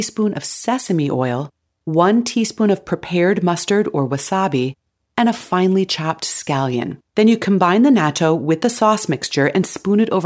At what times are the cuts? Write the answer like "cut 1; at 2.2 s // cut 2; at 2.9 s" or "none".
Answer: cut 1; at 7.1 s